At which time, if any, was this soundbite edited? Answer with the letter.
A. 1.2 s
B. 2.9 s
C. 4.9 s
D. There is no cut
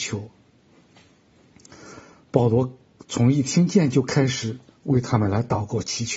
D